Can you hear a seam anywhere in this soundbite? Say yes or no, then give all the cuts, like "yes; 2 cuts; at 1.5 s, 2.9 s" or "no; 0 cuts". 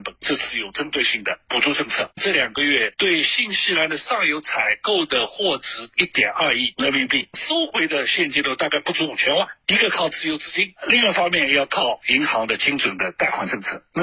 no; 0 cuts